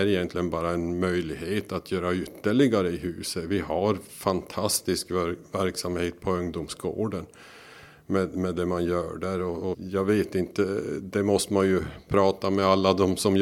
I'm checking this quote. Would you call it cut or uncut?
cut